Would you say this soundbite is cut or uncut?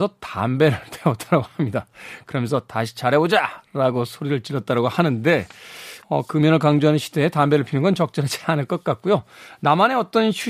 cut